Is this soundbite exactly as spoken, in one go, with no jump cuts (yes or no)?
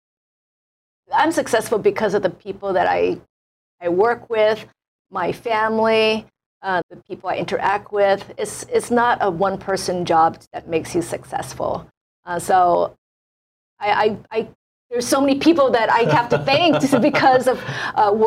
no